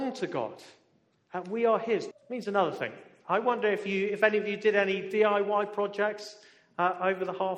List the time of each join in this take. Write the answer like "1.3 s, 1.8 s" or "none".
2.1 s